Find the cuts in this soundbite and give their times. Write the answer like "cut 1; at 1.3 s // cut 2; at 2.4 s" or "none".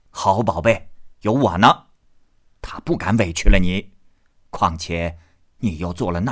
cut 1; at 1.2 s